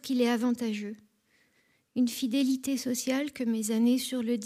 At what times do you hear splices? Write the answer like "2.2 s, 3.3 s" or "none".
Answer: none